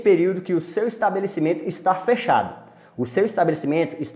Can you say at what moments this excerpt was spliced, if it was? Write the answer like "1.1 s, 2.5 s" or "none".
none